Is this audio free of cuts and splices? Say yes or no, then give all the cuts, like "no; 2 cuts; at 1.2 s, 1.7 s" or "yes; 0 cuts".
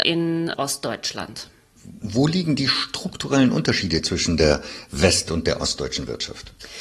yes; 0 cuts